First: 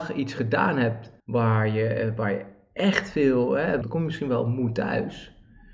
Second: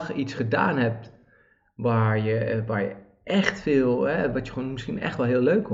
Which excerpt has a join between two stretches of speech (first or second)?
first